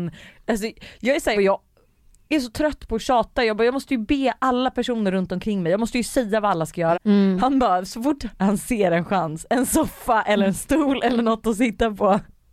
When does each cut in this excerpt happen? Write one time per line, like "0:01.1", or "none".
0:01.3
0:06.9